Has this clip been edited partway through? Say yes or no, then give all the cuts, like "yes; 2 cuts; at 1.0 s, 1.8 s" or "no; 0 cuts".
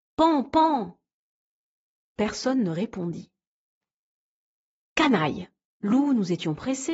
yes; 1 cut; at 5.7 s